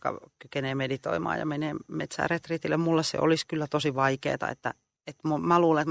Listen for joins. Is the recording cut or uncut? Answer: cut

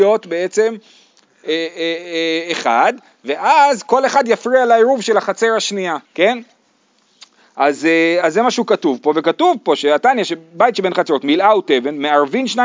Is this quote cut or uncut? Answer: cut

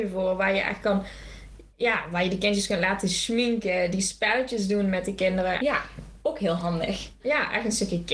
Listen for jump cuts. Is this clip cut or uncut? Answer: cut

